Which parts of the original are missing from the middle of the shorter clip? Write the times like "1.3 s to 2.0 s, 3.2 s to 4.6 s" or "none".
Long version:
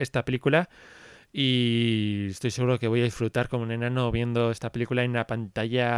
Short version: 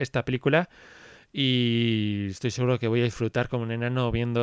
none